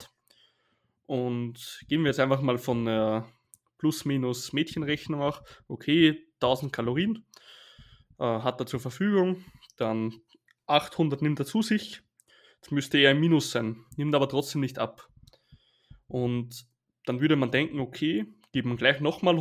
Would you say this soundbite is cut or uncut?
uncut